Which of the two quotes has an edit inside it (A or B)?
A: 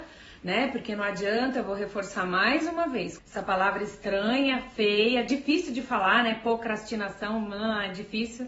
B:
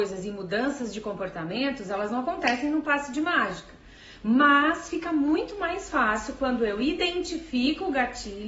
A